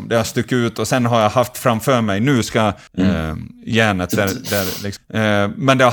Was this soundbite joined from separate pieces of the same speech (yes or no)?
yes